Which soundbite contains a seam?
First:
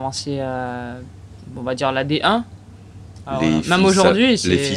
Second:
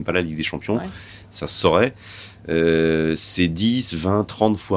first; 1 cut; at 3.2 s

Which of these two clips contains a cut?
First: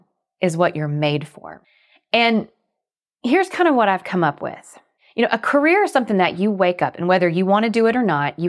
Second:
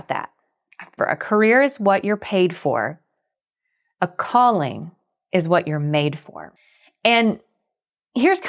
second; 1 cut; at 1.0 s

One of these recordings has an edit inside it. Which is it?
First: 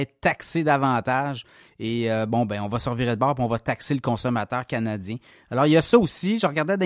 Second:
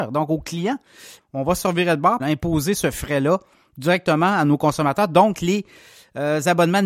second; 2 cuts; at 1.2 s, 2.2 s

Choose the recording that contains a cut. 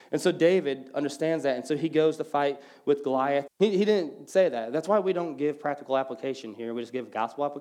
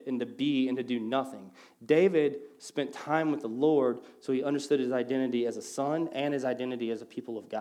first; 1 cut; at 3.5 s

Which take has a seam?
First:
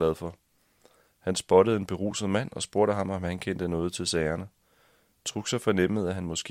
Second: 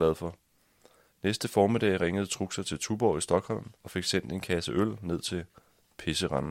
second; 2 cuts; at 1.1 s, 3.8 s

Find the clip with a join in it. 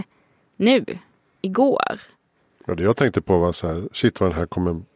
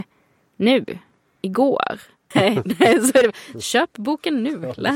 second; 1 cut; at 2.3 s

